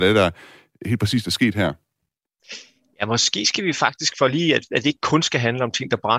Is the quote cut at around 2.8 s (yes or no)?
no